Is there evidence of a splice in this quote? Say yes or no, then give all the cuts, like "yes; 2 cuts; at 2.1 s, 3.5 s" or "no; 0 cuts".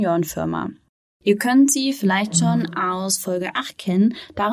no; 0 cuts